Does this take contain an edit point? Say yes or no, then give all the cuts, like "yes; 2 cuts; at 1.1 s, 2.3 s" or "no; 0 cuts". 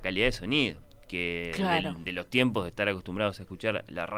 no; 0 cuts